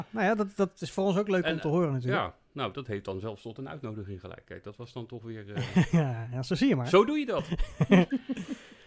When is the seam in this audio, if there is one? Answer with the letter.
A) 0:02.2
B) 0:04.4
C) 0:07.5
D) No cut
D